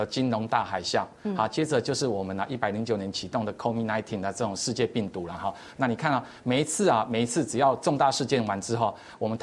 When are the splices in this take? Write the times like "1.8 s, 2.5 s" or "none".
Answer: none

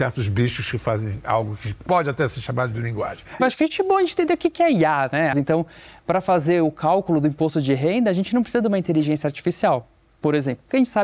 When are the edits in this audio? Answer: 3.4 s, 5.3 s

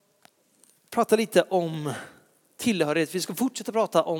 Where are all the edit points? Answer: none

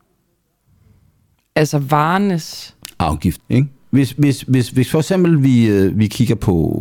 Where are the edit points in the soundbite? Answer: 3.4 s

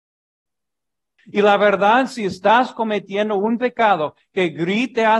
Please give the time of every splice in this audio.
1.2 s

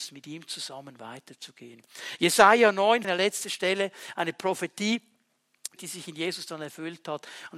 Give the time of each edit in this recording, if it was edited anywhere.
3.0 s, 5.8 s

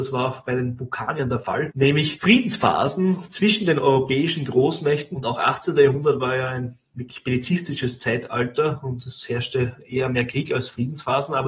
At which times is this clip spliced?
5.1 s

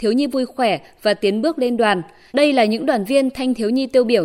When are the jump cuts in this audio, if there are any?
2.3 s

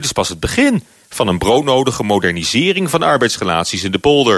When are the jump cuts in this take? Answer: none

